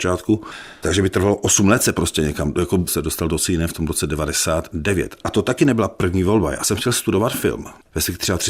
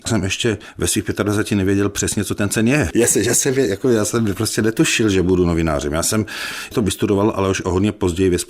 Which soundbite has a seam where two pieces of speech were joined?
first; 2 cuts; at 2.9 s, 5.2 s

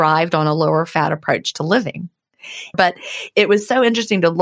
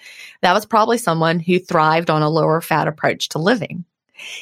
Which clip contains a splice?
first; 1 cut; at 2.7 s

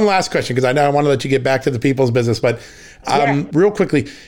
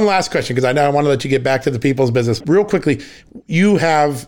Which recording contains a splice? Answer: second; 1 cut; at 2.4 s

